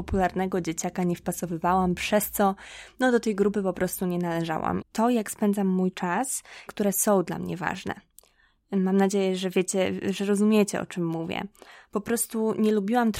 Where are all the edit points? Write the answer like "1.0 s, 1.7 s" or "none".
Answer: 4.8 s, 6.7 s